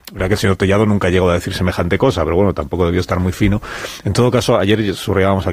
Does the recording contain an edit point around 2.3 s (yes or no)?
no